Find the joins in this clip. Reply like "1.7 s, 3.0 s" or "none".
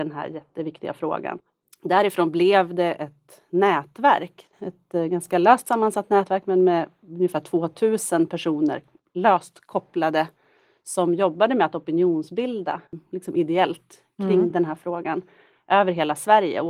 none